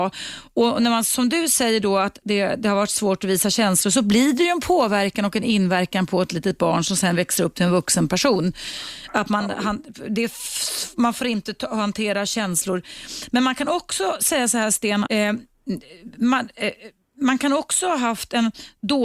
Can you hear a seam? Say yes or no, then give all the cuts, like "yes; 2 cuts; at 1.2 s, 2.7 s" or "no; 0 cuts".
yes; 1 cut; at 15.0 s